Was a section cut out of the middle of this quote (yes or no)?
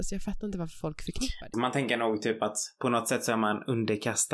yes